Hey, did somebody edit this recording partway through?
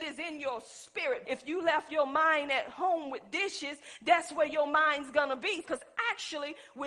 yes; 2 cuts; at 1.2 s, 5.6 s

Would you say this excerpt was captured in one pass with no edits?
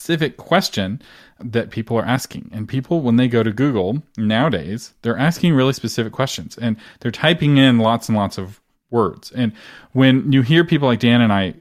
yes; 0 cuts

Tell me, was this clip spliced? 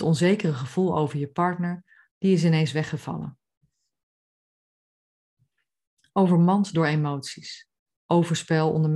yes; 2 cuts; at 2.1 s, 7.9 s

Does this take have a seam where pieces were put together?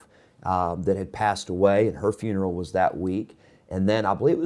no; 0 cuts

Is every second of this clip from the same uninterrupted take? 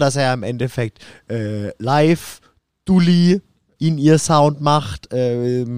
no; 1 cut; at 3.8 s

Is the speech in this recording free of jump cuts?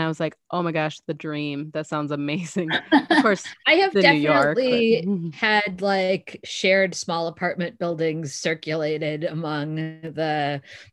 yes; 0 cuts

